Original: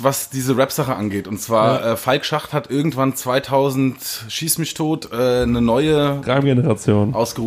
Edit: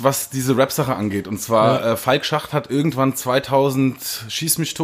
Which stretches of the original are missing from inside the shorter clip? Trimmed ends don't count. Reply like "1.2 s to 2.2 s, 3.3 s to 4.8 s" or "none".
none